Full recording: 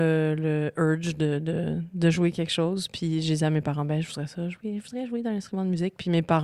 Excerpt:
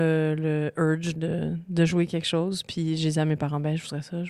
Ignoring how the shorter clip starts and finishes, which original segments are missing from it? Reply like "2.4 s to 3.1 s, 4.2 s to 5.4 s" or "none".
1.2 s to 1.4 s